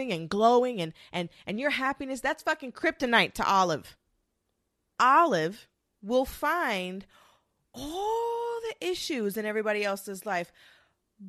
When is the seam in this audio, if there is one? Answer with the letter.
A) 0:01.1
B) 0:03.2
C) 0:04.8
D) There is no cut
D